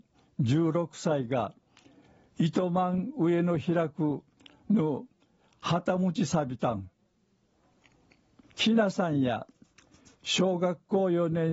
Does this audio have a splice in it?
yes; 1 cut; at 8.4 s

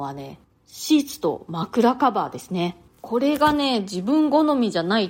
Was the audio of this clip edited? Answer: no; 0 cuts

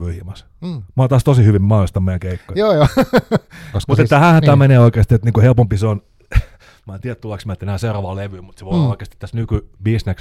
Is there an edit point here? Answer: yes; 1 cut; at 3.7 s

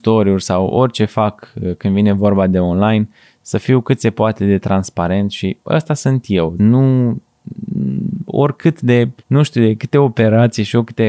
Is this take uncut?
no; 2 cuts; at 6.6 s, 9.2 s

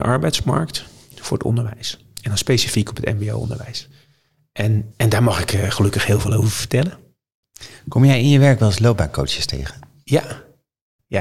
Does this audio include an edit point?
yes; 1 cut; at 4.9 s

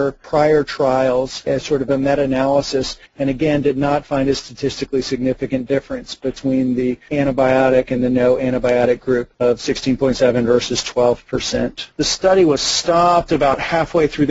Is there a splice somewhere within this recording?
yes; 1 cut; at 11.9 s

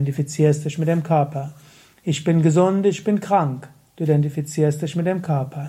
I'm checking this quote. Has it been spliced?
no; 0 cuts

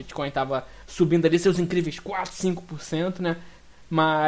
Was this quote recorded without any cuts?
yes; 0 cuts

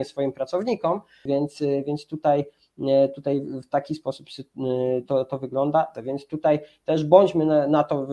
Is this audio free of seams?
no; 2 cuts; at 1.3 s, 5.9 s

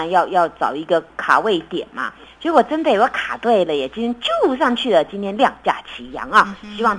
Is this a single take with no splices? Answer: yes; 0 cuts

